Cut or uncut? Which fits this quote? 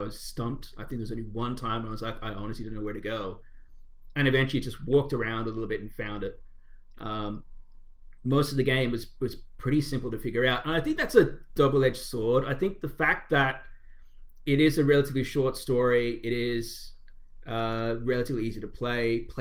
uncut